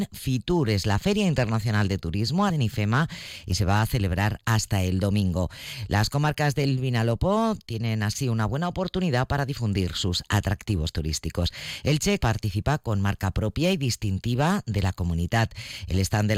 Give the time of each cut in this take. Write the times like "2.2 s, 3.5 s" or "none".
2.5 s, 12.2 s